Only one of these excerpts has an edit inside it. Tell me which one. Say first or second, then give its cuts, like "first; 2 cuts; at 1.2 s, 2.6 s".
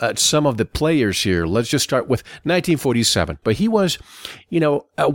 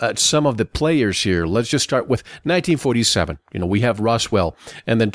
first; 1 cut; at 3.4 s